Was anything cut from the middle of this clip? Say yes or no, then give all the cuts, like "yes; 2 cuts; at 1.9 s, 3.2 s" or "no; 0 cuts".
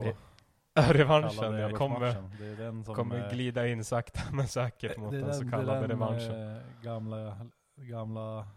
yes; 1 cut; at 1.7 s